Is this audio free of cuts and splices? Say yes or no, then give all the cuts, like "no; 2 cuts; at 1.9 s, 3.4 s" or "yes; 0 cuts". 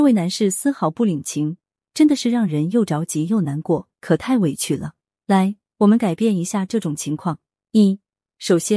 yes; 0 cuts